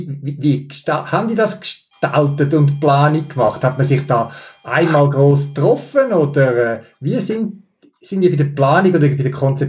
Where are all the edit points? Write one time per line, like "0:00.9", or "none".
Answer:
none